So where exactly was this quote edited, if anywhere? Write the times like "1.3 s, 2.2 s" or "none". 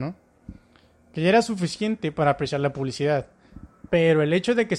3.9 s